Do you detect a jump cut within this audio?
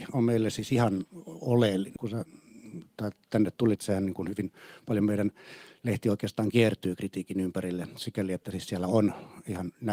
yes; 2 cuts; at 2.0 s, 3.8 s

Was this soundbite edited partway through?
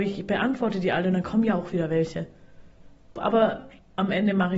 yes; 1 cut; at 3.2 s

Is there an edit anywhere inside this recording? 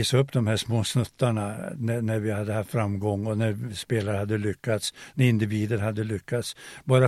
yes; 1 cut; at 5.1 s

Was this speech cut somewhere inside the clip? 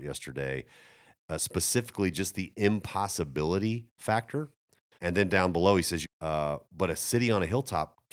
yes; 2 cuts; at 4.9 s, 6.0 s

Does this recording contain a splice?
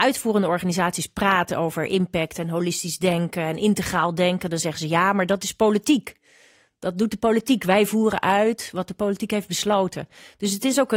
no; 0 cuts

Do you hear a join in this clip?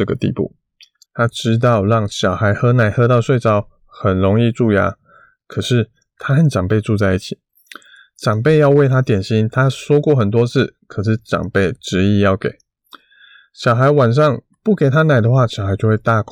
yes; 1 cut; at 1.1 s

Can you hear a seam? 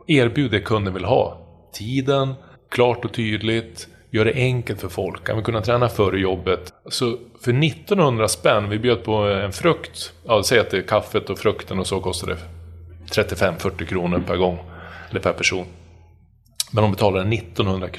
yes; 3 cuts; at 2.5 s, 5.2 s, 6.7 s

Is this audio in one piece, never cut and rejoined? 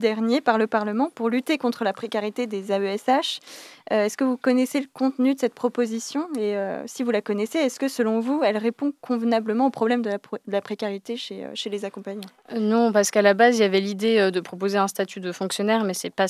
yes; 0 cuts

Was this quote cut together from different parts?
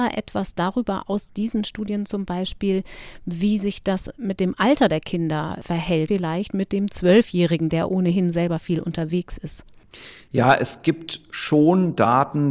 yes; 1 cut; at 6.1 s

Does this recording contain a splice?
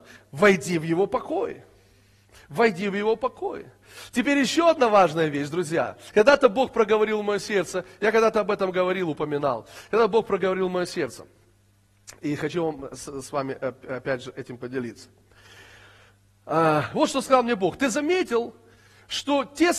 no; 0 cuts

